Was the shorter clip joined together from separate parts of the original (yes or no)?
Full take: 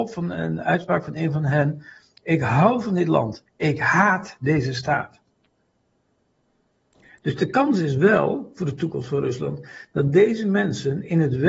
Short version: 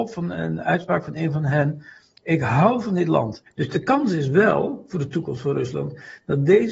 yes